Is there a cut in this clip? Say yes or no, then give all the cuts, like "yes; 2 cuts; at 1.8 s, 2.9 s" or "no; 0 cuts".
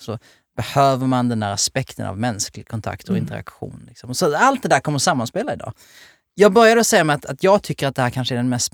no; 0 cuts